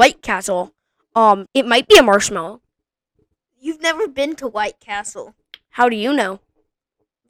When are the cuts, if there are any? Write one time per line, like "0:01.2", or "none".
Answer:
0:01.5